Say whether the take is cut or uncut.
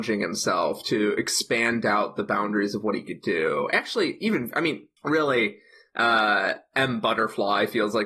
cut